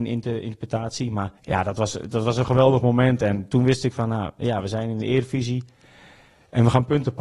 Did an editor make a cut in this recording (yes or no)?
yes